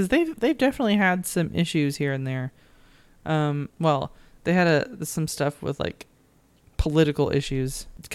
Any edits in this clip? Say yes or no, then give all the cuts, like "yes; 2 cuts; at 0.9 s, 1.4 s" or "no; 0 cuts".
yes; 1 cut; at 3.7 s